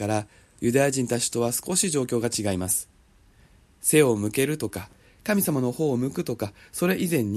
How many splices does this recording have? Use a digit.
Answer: 0